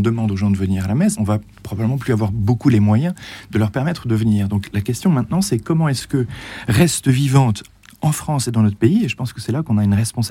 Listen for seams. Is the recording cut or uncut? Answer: cut